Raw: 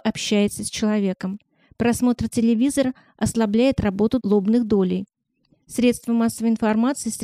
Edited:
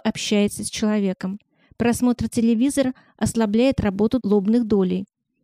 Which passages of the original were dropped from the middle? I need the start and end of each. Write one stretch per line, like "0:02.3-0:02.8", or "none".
none